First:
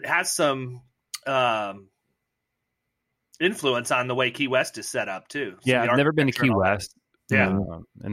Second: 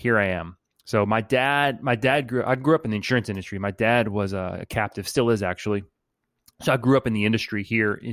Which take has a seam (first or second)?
first